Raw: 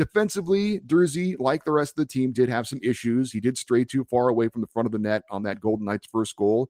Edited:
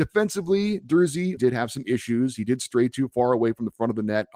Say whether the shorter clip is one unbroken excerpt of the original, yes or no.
no